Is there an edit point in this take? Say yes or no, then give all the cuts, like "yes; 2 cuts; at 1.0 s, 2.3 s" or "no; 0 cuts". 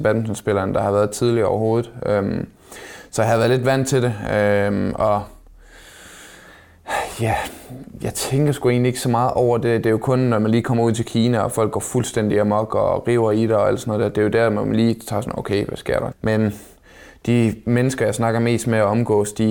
yes; 1 cut; at 16.1 s